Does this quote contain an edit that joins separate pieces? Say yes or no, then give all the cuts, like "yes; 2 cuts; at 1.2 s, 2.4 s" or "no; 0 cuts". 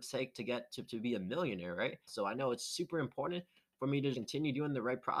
yes; 2 cuts; at 2.1 s, 4.1 s